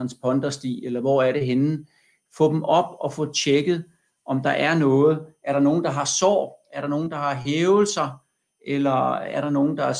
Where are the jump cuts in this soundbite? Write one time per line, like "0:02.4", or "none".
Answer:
none